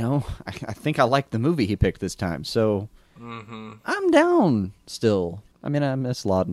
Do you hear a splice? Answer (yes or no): no